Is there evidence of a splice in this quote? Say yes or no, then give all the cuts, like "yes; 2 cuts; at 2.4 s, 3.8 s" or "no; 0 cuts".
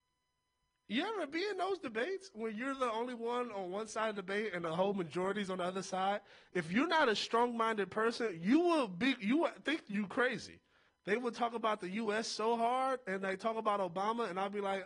yes; 1 cut; at 10.9 s